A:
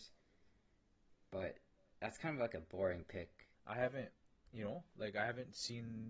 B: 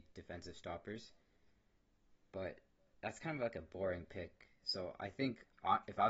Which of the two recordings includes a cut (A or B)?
A